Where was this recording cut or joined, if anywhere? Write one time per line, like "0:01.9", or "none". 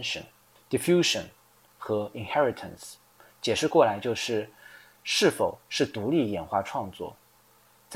none